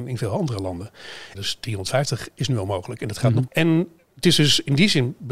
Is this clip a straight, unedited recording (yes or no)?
no